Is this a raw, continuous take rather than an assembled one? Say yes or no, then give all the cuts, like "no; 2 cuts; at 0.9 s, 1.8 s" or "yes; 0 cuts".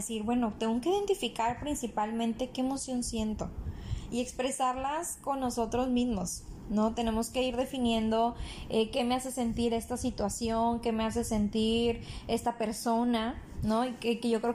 yes; 0 cuts